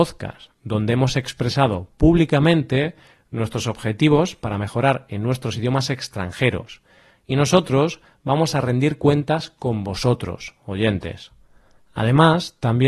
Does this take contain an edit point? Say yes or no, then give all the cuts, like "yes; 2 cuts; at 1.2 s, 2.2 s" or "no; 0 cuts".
no; 0 cuts